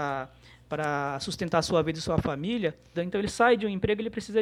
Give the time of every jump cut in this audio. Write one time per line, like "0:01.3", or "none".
0:02.9